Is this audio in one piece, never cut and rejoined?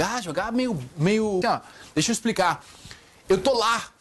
no; 1 cut; at 1.4 s

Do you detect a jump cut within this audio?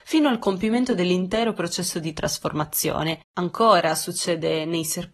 yes; 1 cut; at 3.3 s

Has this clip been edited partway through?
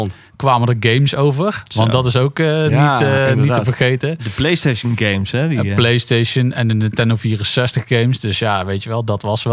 no; 0 cuts

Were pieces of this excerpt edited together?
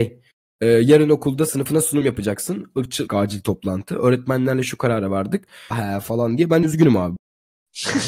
yes; 2 cuts; at 3.1 s, 5.7 s

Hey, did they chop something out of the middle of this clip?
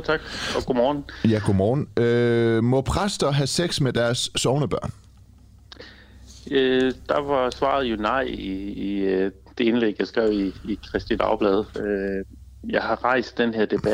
yes; 1 cut; at 11.7 s

